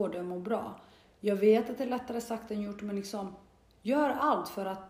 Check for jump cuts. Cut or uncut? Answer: uncut